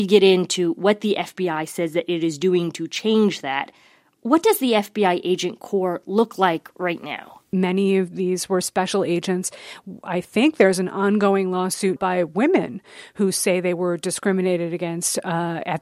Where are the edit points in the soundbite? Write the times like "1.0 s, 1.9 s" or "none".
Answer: 7.5 s, 12.0 s